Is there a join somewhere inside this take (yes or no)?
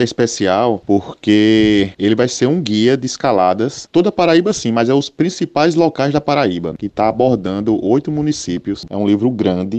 yes